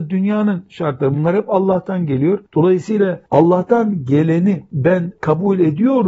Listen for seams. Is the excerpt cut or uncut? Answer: uncut